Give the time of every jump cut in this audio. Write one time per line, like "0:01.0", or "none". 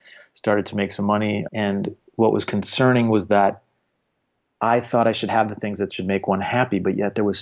0:01.5

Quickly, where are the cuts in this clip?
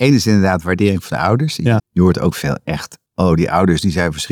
0:01.8
0:03.1

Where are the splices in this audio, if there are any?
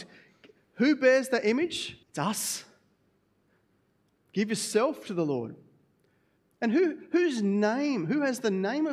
0:02.0

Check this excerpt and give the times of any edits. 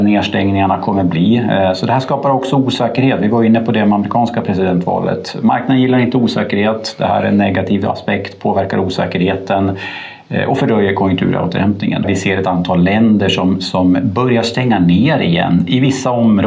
0:12.0

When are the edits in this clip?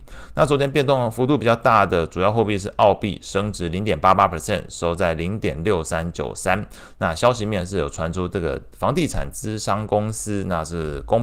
none

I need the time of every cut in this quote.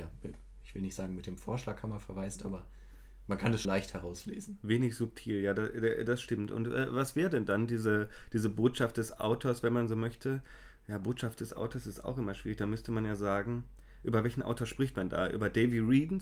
0:03.6

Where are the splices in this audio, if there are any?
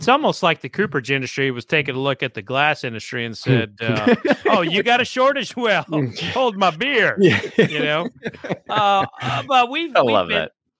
none

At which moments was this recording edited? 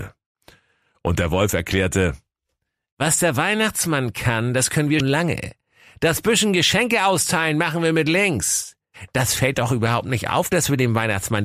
0:05.0

